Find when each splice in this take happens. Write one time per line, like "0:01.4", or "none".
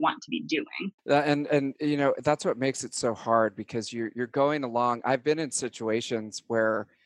0:01.0